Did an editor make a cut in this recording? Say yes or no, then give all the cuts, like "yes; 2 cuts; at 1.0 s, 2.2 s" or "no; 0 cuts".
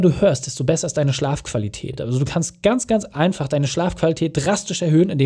no; 0 cuts